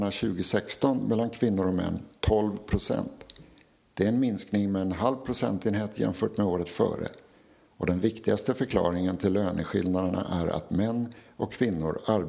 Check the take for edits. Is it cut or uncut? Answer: uncut